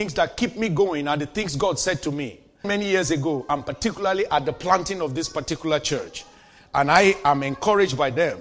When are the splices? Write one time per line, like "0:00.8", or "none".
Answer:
0:02.6